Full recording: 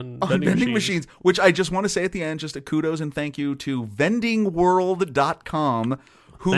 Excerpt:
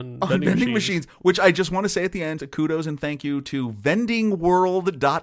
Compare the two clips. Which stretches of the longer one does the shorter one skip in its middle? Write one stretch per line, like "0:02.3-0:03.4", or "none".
0:02.4-0:02.5